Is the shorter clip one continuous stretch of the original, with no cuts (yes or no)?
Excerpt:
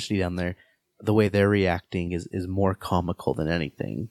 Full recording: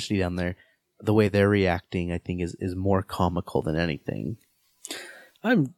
no